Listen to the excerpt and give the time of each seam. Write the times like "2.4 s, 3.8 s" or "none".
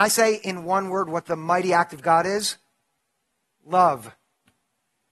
none